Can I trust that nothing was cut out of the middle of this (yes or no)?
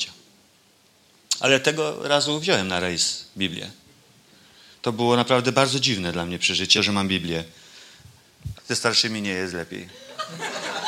no